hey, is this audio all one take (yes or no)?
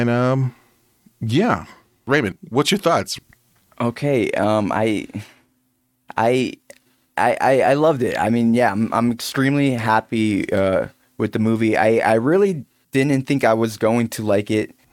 yes